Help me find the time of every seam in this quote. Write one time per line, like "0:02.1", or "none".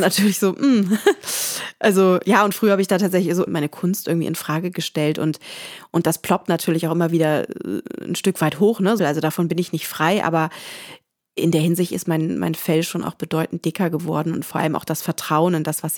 0:03.5
0:09.0